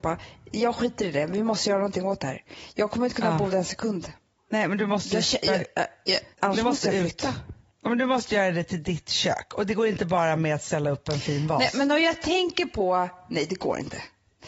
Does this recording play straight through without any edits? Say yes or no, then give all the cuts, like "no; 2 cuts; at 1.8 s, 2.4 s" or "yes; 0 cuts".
no; 1 cut; at 6.3 s